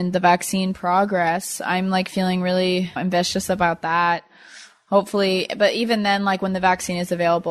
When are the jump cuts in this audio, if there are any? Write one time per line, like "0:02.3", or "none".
0:03.0